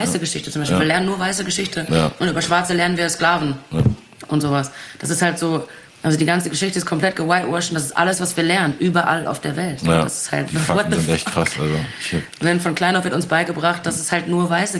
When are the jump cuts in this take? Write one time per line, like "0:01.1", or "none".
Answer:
0:05.9